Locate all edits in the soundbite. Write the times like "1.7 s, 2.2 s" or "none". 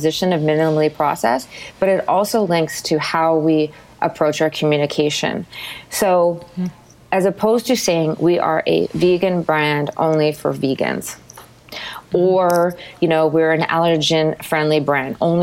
none

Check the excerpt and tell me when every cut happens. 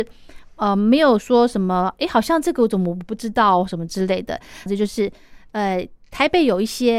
4.7 s

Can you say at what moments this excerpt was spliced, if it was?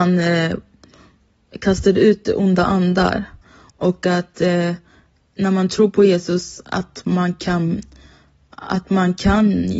3.7 s

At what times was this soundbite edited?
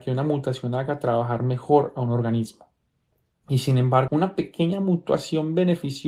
4.1 s

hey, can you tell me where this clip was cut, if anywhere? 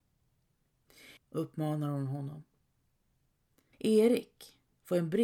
1.2 s, 3.7 s

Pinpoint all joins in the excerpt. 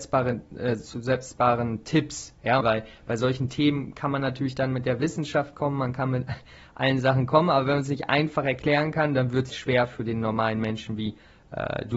2.6 s, 9.5 s

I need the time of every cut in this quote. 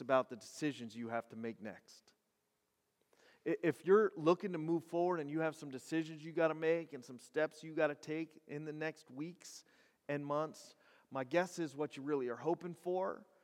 none

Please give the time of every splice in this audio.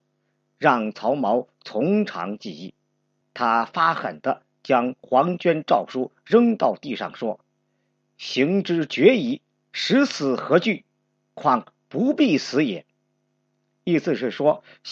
3.2 s

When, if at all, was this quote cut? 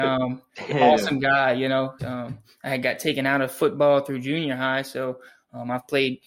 2.0 s

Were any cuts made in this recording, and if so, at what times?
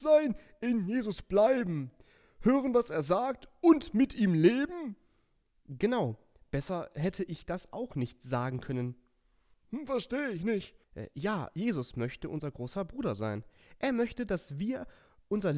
9.5 s, 10.8 s

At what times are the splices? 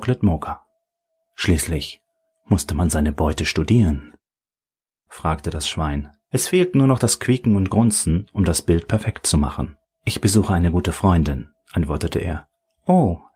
5.1 s

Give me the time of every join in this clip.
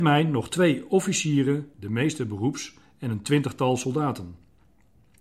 1.7 s

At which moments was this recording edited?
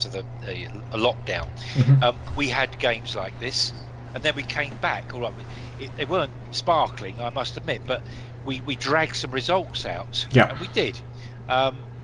none

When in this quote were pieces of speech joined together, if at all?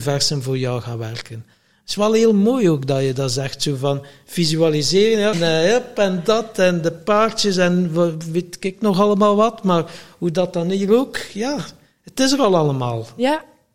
5.3 s

